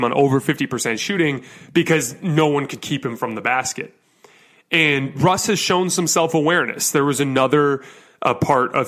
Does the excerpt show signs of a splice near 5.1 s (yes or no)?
yes